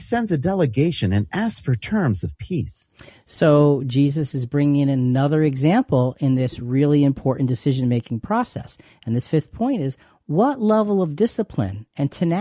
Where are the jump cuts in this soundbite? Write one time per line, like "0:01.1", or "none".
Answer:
none